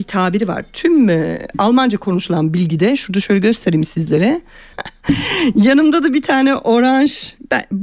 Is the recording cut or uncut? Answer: cut